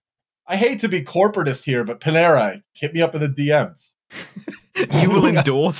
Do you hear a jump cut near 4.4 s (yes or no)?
no